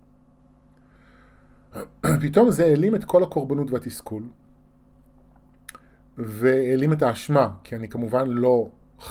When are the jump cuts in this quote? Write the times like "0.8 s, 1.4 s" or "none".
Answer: none